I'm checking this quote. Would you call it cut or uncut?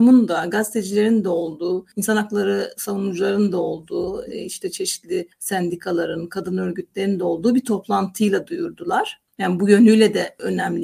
uncut